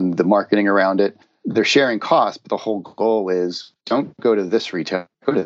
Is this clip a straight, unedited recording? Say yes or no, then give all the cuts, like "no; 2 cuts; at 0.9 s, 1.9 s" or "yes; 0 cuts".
yes; 0 cuts